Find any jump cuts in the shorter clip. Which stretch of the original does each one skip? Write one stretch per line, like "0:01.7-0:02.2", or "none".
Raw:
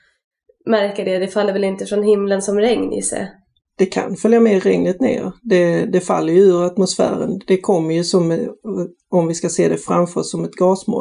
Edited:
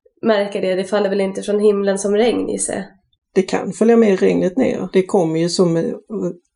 0:05.3-0:07.5